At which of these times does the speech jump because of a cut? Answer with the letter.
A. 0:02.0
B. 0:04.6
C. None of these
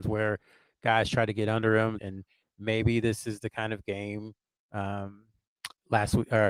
A